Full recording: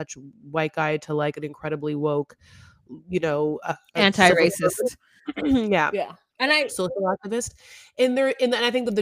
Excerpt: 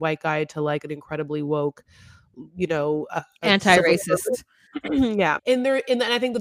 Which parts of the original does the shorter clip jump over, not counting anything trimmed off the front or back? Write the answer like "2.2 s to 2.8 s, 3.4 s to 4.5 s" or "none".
5.9 s to 7.9 s